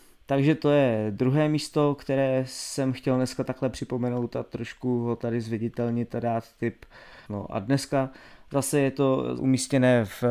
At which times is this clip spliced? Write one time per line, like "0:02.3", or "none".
0:07.3
0:09.4